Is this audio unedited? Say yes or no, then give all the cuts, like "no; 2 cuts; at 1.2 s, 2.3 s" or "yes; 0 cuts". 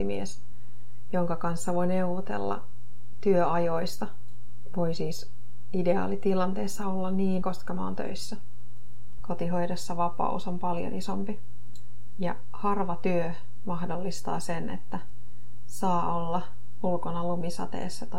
no; 2 cuts; at 7.4 s, 9.2 s